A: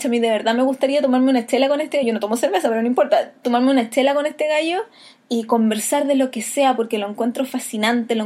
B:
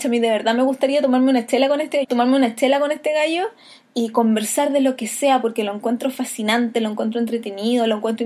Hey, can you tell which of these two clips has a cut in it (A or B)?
B